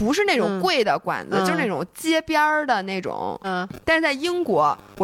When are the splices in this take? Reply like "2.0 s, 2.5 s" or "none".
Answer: 3.4 s